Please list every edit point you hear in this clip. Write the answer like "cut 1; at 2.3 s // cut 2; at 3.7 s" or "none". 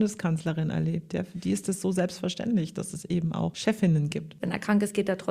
cut 1; at 4.4 s